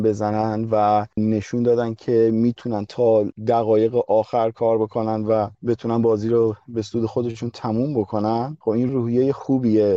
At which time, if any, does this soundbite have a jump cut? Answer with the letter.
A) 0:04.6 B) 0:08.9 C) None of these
B